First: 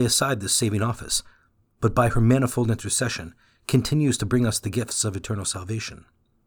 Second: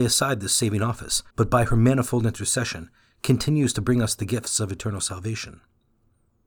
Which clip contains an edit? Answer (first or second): second